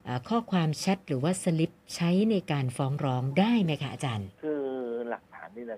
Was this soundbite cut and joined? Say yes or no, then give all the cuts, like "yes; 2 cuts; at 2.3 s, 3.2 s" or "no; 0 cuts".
yes; 1 cut; at 4.3 s